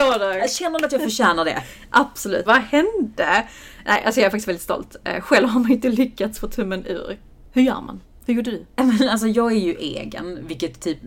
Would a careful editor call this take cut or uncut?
cut